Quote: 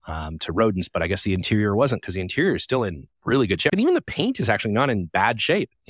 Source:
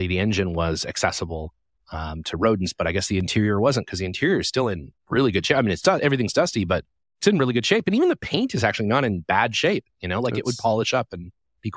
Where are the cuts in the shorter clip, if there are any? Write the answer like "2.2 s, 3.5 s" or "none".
3.7 s